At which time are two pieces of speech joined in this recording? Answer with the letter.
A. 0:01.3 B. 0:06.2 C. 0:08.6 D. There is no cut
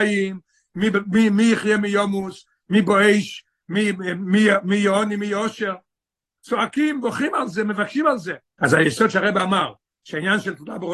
C